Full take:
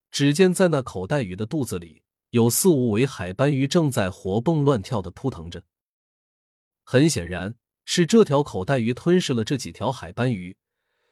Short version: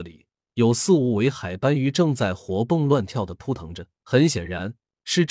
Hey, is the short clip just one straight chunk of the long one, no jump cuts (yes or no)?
no